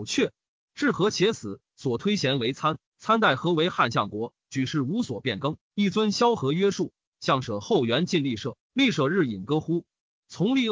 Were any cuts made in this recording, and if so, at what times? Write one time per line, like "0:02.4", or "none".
0:02.9
0:07.1